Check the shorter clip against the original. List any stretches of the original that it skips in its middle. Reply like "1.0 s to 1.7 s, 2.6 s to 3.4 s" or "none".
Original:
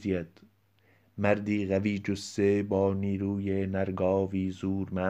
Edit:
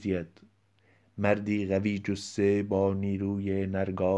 none